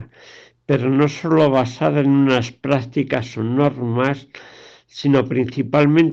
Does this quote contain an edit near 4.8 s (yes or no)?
no